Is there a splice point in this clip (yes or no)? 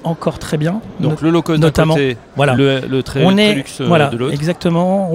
no